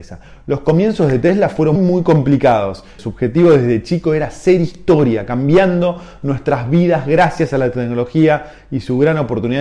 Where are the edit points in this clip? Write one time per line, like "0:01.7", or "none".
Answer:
0:01.8
0:03.0